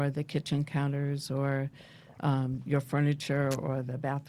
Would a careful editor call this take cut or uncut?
uncut